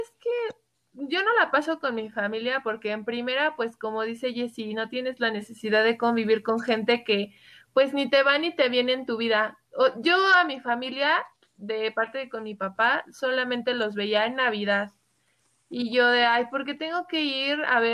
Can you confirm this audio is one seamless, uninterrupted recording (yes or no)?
yes